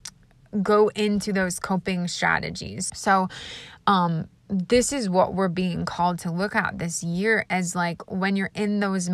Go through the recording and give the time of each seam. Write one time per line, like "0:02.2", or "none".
0:02.9